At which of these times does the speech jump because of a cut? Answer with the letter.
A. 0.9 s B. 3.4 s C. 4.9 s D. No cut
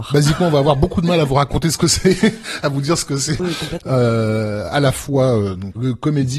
B